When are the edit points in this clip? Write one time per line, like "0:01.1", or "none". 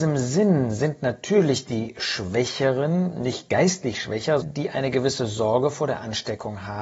0:04.4